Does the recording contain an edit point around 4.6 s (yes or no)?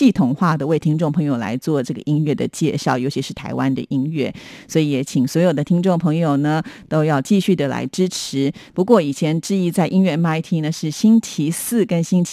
no